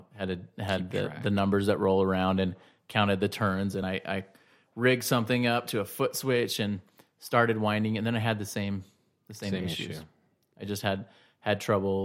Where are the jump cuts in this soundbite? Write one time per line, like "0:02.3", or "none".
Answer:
none